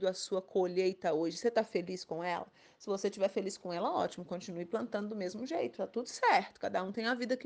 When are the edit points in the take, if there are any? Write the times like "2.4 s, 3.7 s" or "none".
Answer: none